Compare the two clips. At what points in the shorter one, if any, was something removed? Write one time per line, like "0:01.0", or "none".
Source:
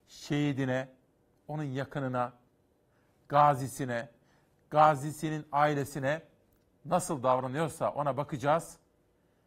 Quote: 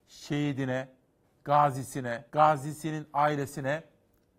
0:01.2
0:02.3